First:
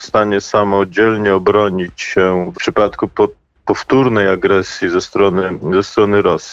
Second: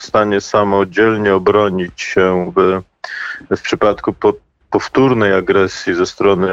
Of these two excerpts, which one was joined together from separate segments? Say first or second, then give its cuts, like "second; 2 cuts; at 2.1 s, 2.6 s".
first; 1 cut; at 2.5 s